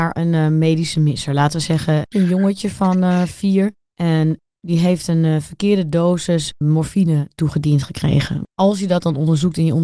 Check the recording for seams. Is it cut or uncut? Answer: cut